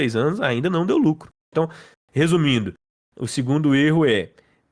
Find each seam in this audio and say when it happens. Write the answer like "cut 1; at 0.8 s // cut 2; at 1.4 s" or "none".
cut 1; at 1.5 s